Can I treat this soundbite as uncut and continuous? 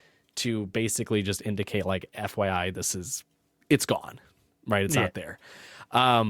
no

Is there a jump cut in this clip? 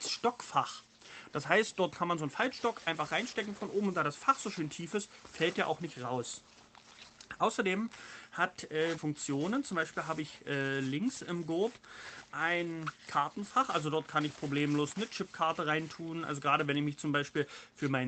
yes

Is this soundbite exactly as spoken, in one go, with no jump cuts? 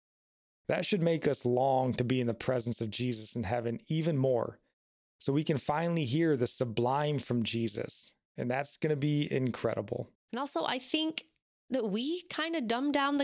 no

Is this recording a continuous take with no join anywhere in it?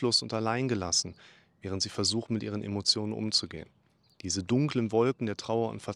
yes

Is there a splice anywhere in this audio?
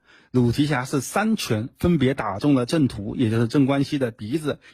no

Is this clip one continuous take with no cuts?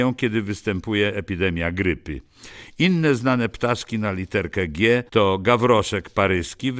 no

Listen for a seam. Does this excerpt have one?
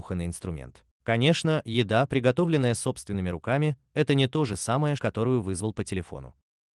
yes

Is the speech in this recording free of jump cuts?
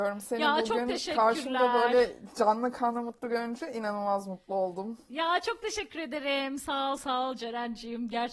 yes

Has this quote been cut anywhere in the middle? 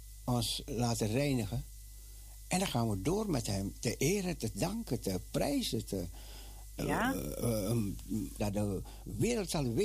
yes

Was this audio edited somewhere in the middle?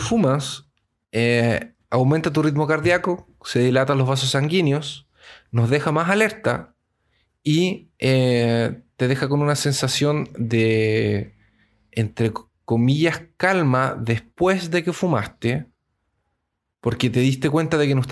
no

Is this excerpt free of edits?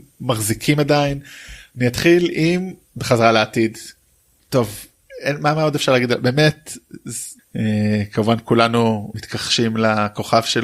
no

